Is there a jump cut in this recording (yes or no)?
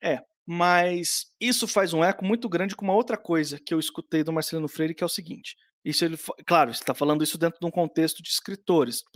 no